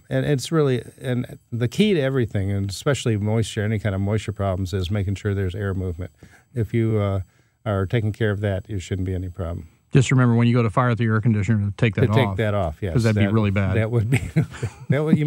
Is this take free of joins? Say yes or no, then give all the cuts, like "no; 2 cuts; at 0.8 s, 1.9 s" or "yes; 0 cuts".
yes; 0 cuts